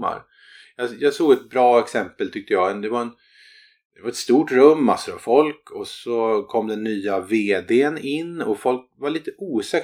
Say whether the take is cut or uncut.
uncut